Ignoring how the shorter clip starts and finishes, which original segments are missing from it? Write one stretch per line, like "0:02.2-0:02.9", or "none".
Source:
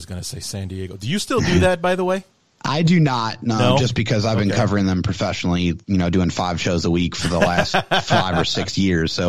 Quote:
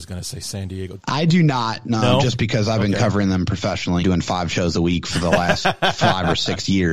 0:01.0-0:02.6
0:05.6-0:06.1